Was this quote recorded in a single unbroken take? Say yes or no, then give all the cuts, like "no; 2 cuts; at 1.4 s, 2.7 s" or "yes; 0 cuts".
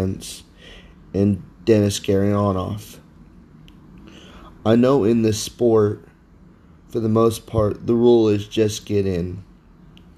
yes; 0 cuts